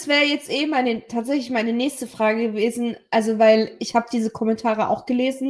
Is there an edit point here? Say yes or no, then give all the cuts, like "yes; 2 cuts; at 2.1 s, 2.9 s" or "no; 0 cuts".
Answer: no; 0 cuts